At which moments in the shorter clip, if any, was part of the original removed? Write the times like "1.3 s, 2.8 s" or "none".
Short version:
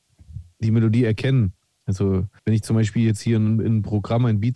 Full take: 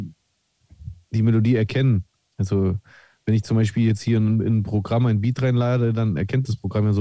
2.4 s